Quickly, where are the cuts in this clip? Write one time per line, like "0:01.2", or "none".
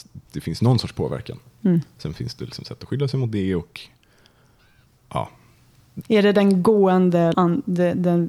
0:06.0
0:07.3